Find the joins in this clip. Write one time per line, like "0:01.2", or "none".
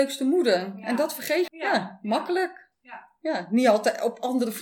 0:01.5